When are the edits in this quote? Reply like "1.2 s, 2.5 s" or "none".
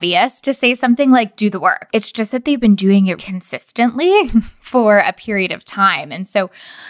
1.9 s, 3.2 s